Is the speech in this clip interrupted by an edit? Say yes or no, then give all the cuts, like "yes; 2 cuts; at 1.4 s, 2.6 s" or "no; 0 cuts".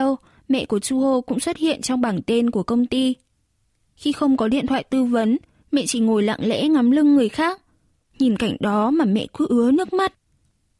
yes; 2 cuts; at 3.9 s, 8.1 s